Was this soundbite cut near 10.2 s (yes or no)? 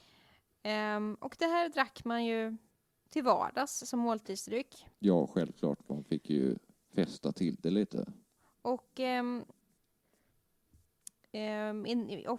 no